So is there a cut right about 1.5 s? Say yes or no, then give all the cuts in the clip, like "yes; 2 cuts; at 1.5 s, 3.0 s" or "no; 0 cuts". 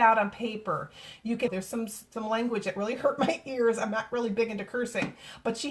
yes; 1 cut; at 1.5 s